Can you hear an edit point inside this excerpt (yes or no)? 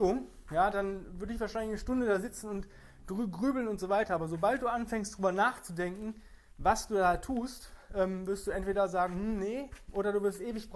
no